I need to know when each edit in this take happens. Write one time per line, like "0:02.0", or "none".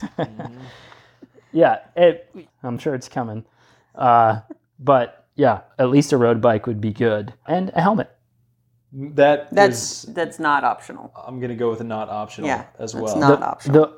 0:02.5
0:05.7
0:07.5